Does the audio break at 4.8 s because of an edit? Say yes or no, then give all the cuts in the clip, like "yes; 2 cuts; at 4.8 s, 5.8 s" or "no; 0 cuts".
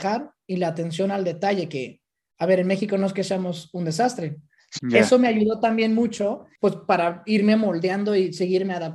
yes; 1 cut; at 4.8 s